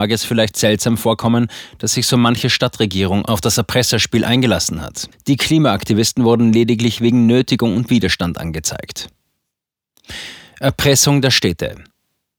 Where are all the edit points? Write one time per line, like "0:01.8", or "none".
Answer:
0:05.1